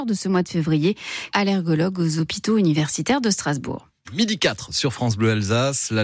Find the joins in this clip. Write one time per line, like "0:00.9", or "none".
0:01.3
0:04.0